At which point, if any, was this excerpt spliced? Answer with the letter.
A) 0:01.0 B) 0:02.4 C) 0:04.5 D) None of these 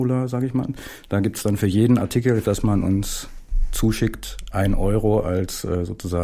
B